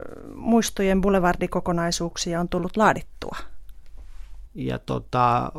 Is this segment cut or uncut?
cut